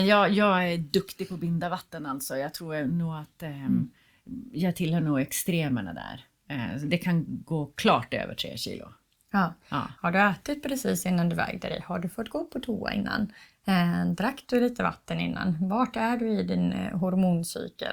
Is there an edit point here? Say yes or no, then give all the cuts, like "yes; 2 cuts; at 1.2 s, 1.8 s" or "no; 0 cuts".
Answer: yes; 1 cut; at 10.0 s